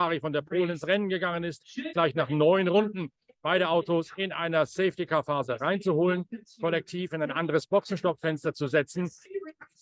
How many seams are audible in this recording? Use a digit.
1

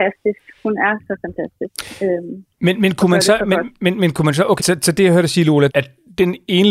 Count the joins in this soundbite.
2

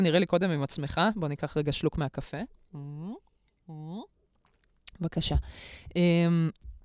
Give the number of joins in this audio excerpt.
0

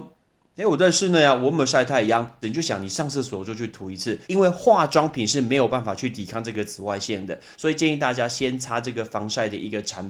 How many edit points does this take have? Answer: 2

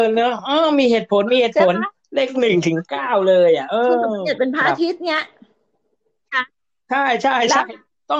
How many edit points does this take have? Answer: 0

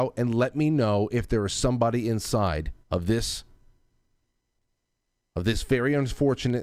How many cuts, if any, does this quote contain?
1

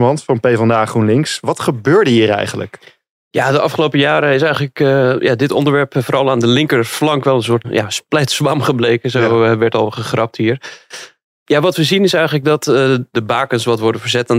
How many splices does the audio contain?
1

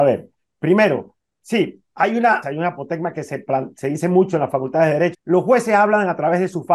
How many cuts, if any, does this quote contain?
2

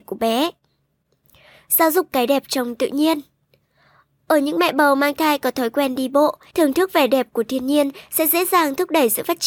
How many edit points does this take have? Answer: 1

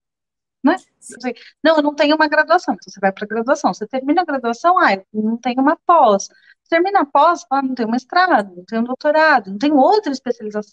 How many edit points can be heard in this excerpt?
1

